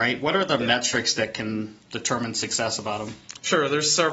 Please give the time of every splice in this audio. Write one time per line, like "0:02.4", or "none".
0:01.8